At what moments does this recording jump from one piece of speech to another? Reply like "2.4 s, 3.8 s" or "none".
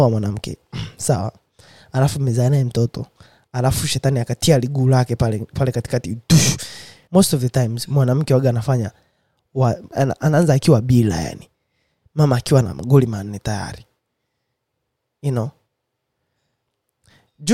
7.1 s, 9.9 s

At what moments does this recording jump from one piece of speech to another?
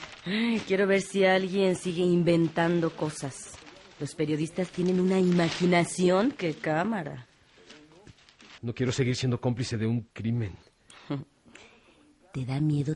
8.6 s, 10.1 s

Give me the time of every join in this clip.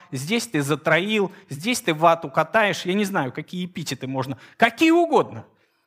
none

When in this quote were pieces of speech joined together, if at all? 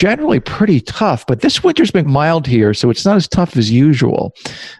2.0 s

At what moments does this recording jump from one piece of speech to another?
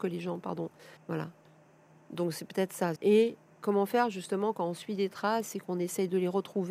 1.0 s, 3.0 s

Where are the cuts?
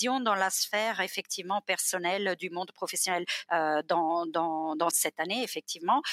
3.5 s, 4.9 s

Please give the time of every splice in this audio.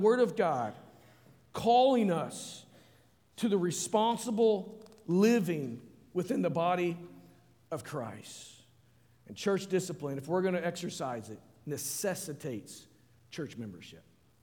none

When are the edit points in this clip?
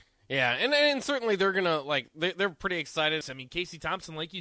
3.2 s

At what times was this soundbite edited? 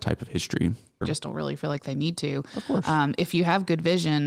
1.0 s

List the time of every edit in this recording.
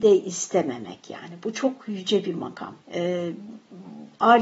2.8 s

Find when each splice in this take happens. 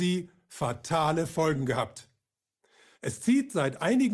2.9 s

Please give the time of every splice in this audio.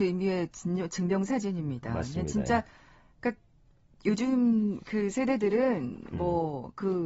none

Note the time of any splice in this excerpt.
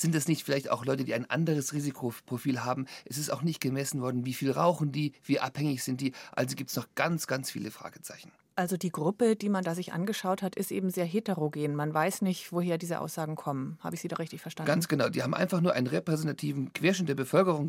none

